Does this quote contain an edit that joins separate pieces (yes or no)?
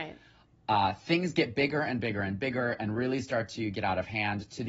no